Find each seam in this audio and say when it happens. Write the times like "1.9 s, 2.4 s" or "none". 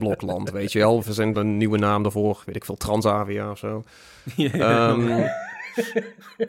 1.3 s